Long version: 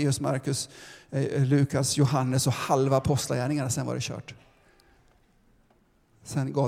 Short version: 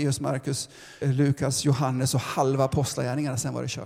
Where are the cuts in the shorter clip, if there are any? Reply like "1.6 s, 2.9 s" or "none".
1.0 s